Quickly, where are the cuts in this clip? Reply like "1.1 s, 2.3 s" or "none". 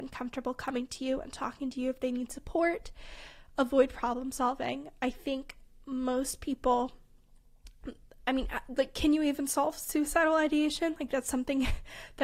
none

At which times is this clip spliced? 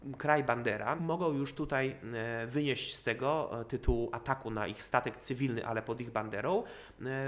1.0 s

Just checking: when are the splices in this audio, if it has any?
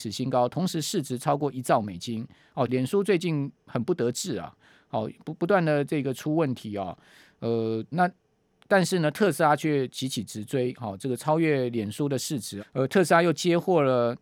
2.7 s, 7.9 s, 12.6 s

